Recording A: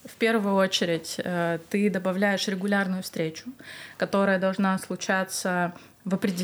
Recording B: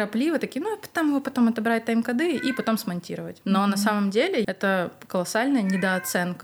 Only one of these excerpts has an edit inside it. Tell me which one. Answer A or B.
B